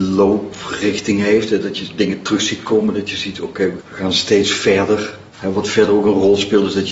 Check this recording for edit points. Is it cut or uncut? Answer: cut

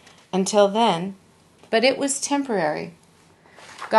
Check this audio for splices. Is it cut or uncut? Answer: cut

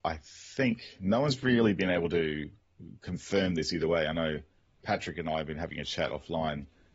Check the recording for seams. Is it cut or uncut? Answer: uncut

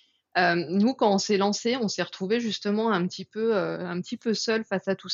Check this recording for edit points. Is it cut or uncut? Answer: uncut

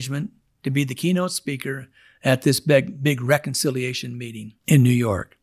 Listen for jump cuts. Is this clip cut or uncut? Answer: uncut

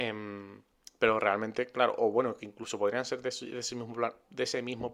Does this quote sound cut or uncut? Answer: uncut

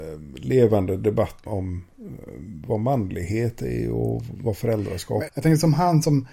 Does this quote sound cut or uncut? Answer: cut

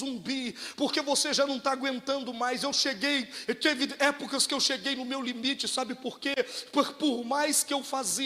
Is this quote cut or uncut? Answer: uncut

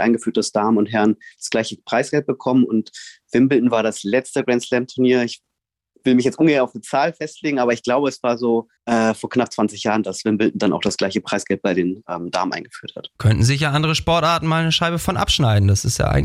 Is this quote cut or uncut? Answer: cut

